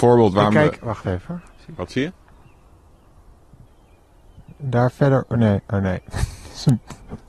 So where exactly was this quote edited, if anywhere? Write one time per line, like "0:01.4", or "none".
none